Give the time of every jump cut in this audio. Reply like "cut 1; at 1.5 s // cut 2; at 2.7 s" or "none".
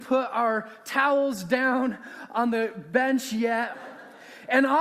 cut 1; at 3.7 s